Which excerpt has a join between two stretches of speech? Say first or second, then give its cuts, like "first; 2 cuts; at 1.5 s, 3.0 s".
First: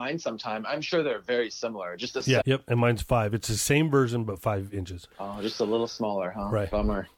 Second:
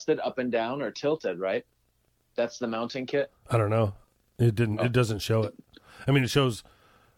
first; 2 cuts; at 2.4 s, 5.1 s